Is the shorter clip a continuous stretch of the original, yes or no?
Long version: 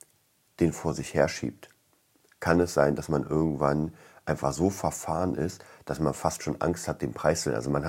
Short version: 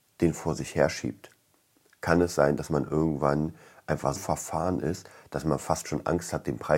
no